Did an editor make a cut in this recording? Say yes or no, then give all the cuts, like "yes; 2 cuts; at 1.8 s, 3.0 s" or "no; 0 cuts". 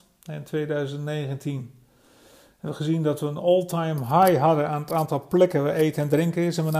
no; 0 cuts